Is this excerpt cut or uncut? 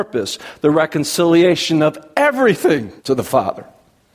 cut